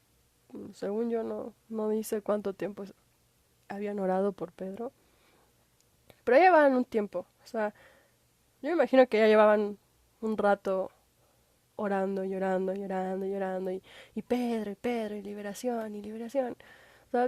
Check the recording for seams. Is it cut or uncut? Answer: uncut